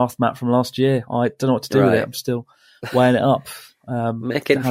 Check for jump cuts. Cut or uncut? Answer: uncut